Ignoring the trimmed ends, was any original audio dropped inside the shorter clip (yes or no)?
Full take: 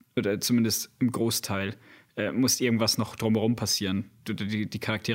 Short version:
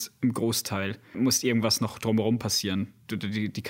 yes